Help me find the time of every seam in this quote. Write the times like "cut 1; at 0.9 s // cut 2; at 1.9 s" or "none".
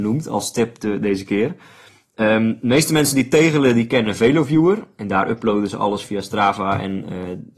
none